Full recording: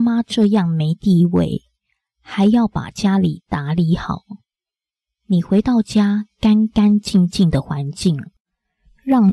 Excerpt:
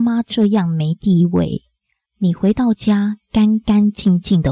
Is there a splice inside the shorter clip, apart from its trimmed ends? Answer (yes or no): yes